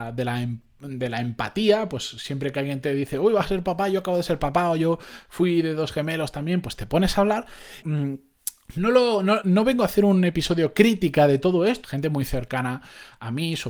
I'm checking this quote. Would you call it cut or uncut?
cut